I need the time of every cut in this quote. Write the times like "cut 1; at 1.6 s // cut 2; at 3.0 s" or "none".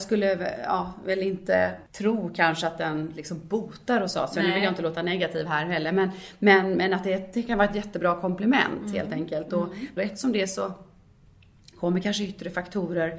cut 1; at 10.0 s

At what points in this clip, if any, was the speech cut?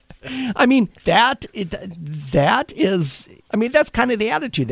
cut 1; at 1.0 s // cut 2; at 3.5 s

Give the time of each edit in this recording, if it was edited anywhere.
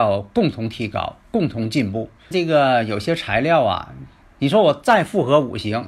cut 1; at 2.3 s // cut 2; at 4.2 s

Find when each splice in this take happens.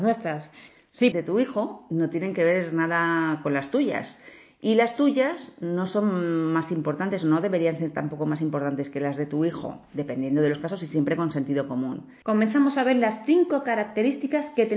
cut 1; at 1.1 s // cut 2; at 12.2 s

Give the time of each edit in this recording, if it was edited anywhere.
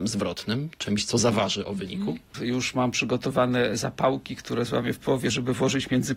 cut 1; at 2.3 s

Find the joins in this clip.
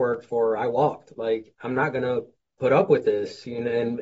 none

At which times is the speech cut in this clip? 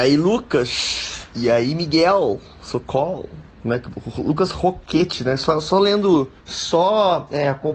none

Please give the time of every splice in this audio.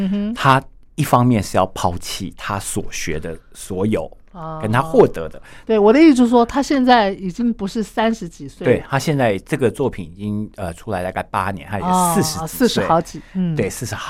cut 1; at 5.6 s

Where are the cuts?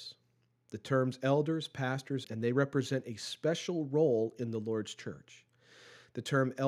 cut 1; at 2.2 s

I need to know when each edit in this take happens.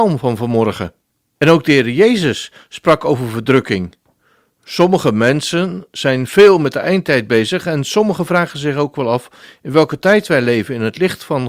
cut 1; at 1.4 s

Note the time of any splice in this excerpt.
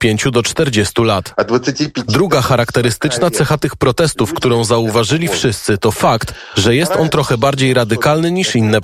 none

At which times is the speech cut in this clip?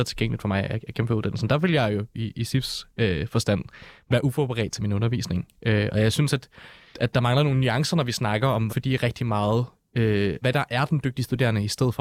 cut 1; at 6.9 s // cut 2; at 8.7 s // cut 3; at 10.4 s

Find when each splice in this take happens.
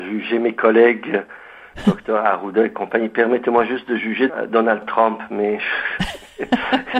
cut 1; at 4.3 s

